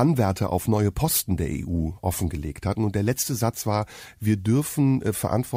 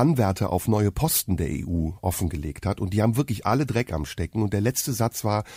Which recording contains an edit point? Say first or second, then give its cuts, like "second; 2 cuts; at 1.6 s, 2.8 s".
first; 1 cut; at 2.8 s